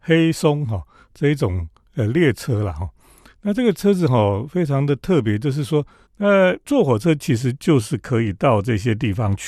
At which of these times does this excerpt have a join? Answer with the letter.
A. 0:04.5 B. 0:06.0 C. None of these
B